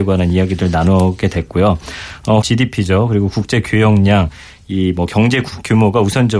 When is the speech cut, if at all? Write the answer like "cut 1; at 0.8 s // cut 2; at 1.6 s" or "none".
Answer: cut 1; at 2.4 s